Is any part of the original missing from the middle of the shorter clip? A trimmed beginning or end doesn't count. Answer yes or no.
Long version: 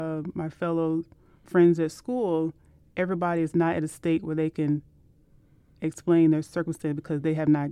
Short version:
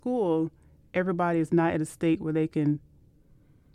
no